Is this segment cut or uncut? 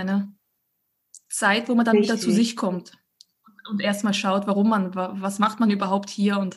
uncut